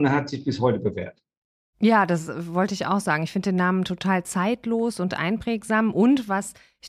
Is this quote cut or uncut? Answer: uncut